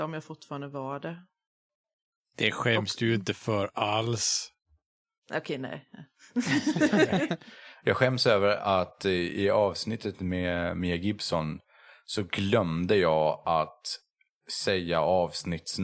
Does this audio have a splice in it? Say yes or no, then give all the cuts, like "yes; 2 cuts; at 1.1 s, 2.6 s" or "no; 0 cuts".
no; 0 cuts